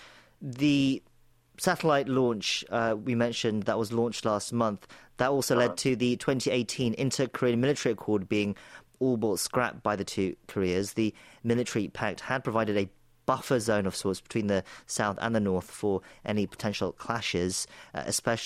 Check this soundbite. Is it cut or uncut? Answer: uncut